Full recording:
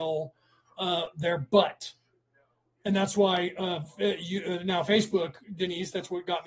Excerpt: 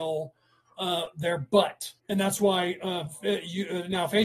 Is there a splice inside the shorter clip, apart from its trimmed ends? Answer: yes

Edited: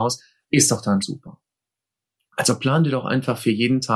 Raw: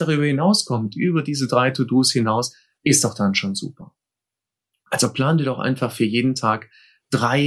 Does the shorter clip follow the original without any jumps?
no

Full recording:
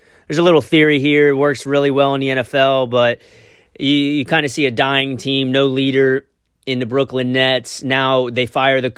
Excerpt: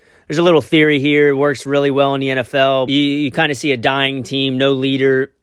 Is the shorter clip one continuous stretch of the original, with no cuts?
no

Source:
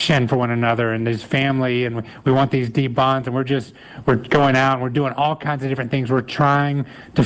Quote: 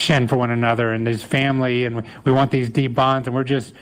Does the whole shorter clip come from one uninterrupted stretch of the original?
yes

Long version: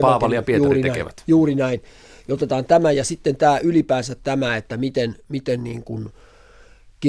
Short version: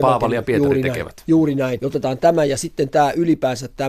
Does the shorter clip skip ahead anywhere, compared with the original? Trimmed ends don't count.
yes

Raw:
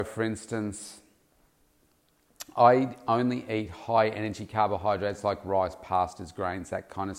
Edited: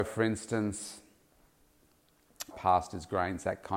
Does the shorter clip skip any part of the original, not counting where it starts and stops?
yes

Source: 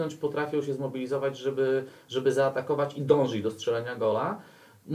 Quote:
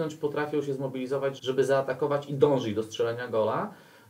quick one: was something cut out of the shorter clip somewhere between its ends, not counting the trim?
yes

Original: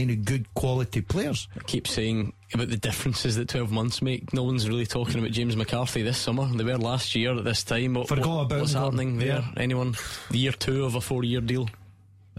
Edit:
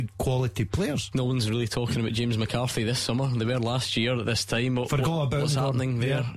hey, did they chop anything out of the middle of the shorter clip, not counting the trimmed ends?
yes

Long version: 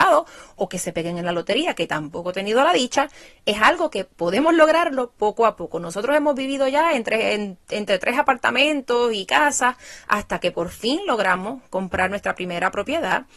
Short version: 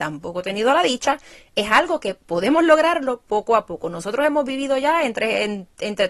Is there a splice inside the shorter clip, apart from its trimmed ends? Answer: no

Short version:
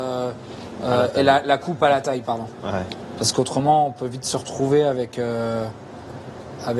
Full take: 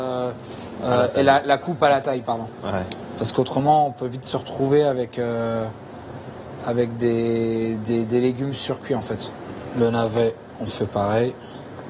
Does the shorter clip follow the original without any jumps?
yes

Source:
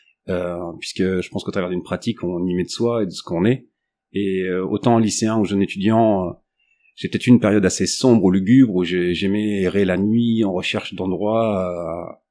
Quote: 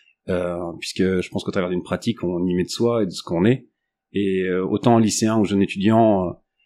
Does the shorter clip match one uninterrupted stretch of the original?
yes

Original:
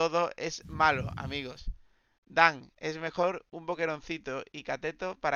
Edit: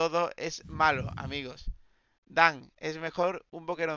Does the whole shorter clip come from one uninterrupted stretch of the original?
yes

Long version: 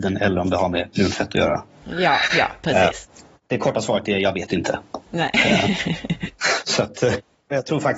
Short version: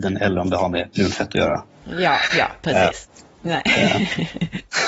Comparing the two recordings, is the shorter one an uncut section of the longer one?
no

